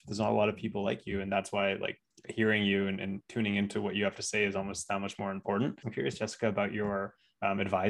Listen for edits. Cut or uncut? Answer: uncut